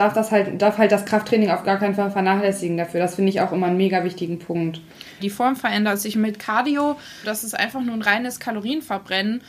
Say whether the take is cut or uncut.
cut